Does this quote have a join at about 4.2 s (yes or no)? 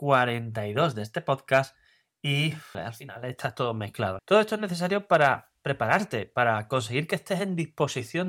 yes